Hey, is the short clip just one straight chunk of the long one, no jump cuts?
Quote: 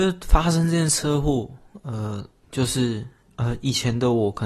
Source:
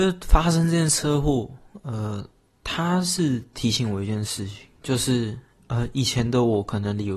no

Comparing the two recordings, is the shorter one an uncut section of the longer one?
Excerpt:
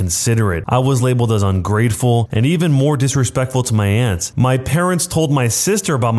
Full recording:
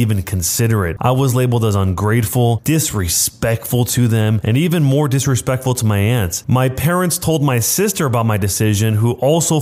no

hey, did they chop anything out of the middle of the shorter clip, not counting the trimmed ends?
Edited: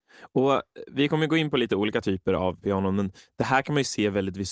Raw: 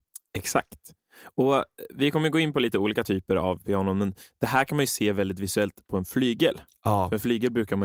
no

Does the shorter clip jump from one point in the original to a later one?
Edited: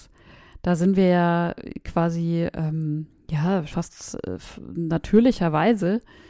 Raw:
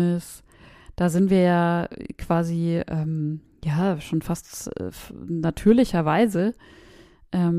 yes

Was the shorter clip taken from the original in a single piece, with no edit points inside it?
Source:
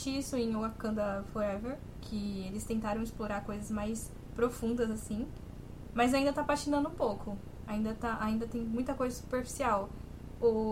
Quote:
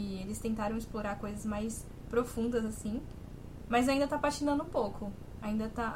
yes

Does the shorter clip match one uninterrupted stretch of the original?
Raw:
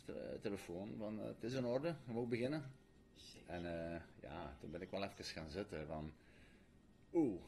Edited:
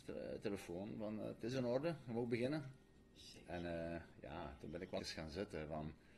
no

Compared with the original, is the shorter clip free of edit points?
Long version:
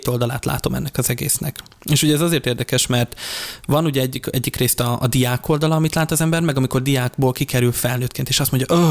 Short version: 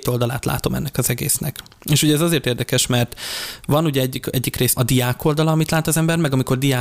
no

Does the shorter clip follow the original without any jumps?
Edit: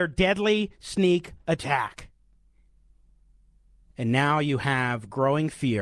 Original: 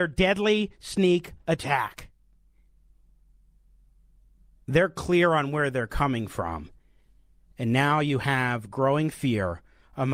no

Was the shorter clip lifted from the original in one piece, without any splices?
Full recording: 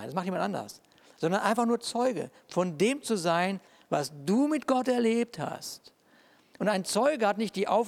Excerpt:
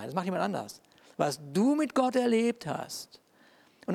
no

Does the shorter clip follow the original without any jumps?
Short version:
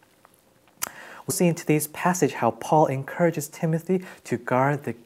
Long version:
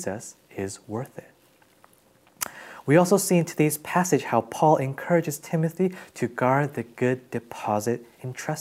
no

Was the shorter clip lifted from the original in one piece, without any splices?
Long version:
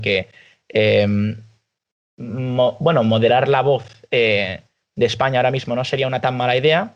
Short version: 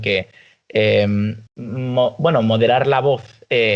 no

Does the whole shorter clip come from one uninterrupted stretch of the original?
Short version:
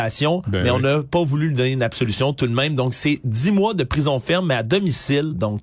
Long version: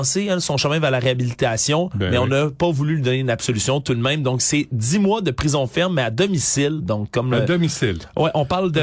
yes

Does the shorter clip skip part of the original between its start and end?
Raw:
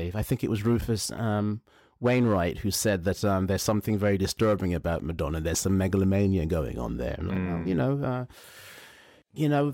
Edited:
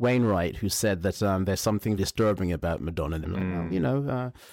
yes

